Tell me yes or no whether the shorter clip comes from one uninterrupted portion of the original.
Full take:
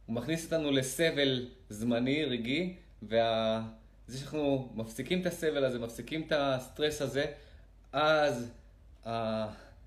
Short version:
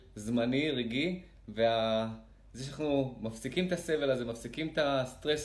yes